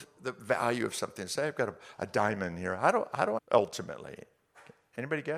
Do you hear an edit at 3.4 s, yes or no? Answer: yes